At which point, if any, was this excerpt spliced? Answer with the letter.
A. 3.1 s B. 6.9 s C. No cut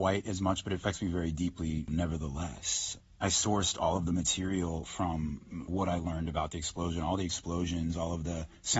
C